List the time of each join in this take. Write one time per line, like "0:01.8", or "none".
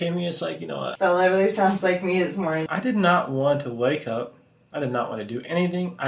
0:01.0
0:02.7